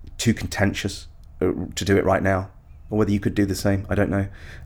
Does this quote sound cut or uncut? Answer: cut